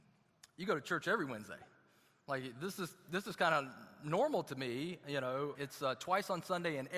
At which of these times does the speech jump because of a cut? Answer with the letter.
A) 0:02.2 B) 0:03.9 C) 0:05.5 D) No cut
C